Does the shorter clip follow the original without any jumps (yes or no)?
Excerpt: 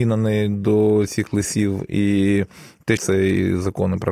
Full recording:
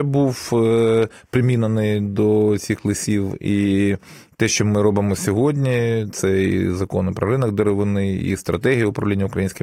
no